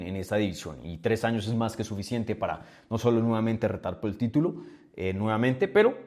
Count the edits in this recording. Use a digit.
0